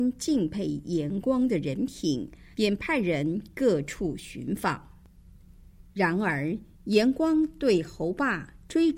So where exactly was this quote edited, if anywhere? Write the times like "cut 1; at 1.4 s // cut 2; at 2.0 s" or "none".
cut 1; at 2.5 s // cut 2; at 5.9 s